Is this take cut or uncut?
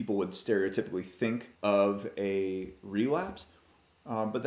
cut